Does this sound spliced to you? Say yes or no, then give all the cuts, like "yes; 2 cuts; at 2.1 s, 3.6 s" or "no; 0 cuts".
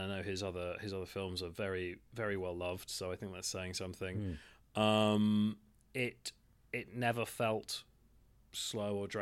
no; 0 cuts